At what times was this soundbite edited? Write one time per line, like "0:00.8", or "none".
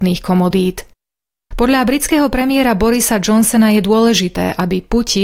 none